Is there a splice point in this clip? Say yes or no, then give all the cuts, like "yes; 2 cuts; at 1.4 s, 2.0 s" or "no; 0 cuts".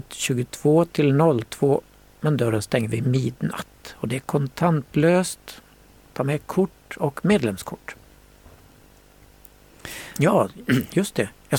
no; 0 cuts